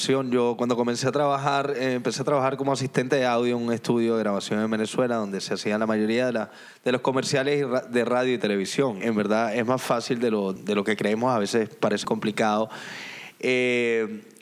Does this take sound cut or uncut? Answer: cut